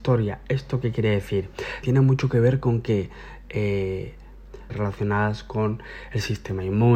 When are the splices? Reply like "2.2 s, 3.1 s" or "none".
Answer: 1.8 s, 4.7 s

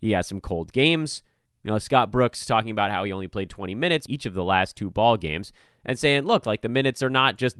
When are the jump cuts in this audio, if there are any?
1.5 s, 4.1 s

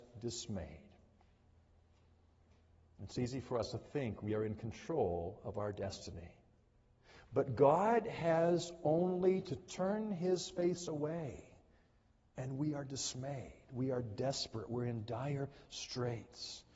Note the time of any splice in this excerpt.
none

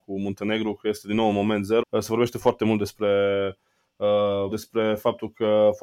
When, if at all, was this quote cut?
1.8 s, 4.5 s

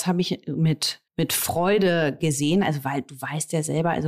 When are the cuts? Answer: 1.1 s

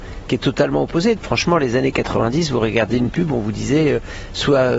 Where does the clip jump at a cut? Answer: 1.2 s

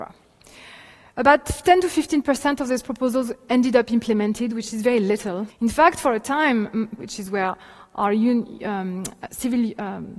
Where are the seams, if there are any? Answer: 5.5 s, 7.0 s

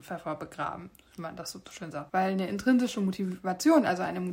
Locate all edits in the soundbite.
2.1 s

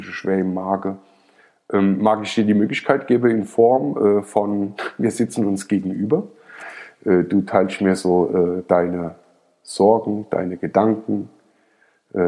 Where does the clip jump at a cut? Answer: none

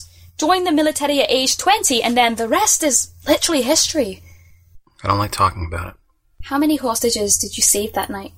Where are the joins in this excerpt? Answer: none

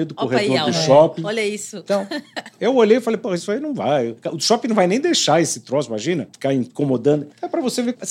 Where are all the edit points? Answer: none

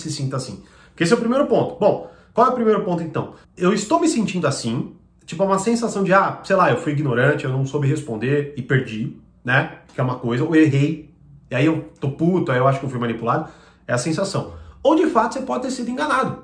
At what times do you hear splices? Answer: 3.4 s

